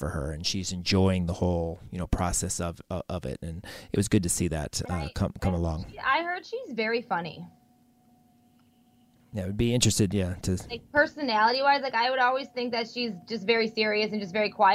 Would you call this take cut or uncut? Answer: uncut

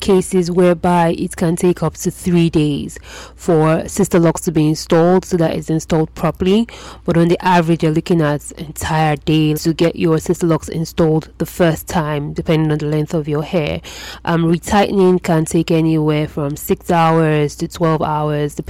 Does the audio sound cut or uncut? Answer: cut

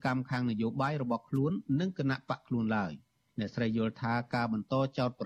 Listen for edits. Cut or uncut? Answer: uncut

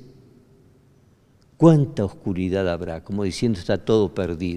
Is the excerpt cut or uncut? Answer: uncut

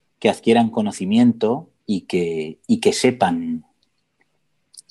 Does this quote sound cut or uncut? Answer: cut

